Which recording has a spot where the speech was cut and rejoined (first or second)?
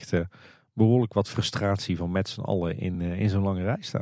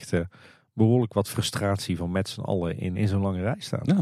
second